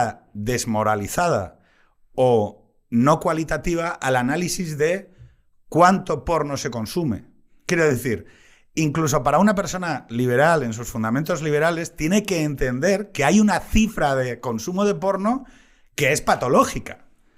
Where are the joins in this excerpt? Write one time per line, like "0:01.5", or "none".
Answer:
none